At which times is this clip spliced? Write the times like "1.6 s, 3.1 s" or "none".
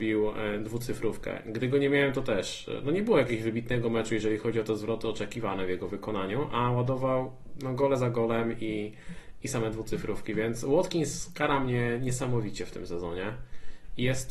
none